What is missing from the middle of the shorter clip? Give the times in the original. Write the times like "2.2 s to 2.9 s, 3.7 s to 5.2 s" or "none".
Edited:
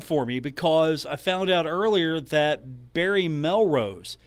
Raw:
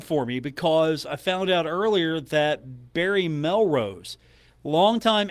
none